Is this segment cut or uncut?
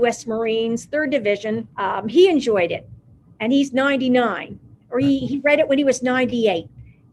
cut